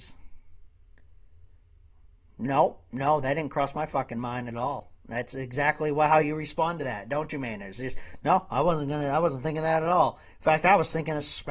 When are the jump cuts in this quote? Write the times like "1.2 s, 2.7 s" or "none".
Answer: none